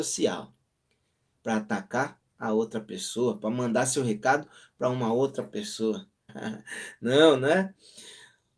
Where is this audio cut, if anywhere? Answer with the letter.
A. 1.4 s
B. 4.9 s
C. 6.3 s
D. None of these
C